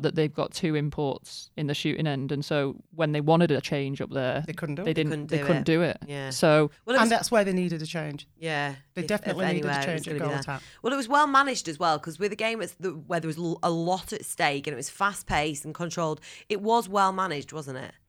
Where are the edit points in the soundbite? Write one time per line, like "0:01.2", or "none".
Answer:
none